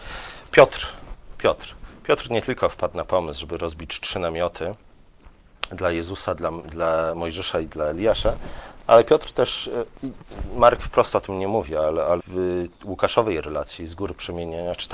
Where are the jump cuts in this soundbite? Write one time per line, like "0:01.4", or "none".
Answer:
0:12.2